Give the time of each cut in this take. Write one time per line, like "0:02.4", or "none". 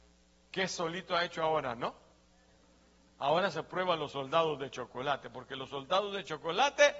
none